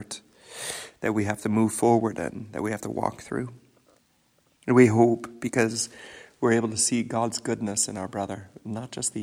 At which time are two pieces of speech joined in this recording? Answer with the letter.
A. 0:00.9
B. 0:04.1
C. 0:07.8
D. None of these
D